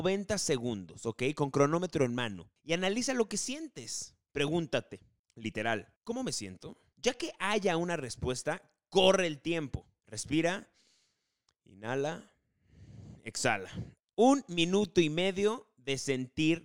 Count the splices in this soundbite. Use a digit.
2